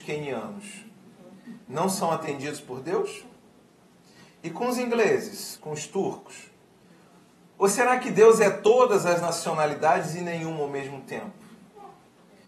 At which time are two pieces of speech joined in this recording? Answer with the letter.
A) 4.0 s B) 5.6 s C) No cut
B